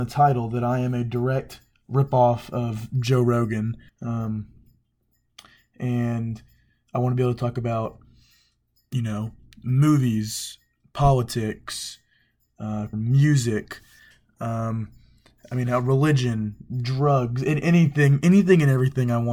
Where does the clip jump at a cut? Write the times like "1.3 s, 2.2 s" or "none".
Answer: 3.9 s, 12.9 s